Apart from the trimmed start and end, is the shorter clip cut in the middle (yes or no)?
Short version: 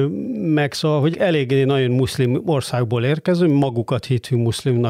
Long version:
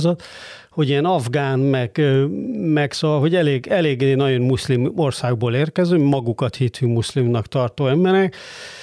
yes